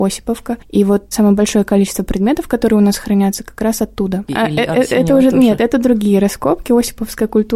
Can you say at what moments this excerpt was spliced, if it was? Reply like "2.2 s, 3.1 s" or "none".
1.1 s, 4.3 s